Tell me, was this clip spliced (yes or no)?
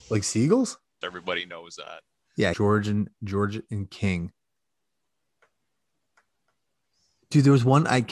yes